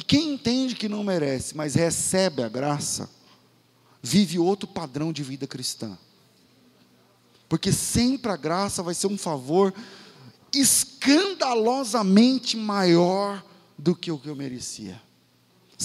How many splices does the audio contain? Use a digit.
0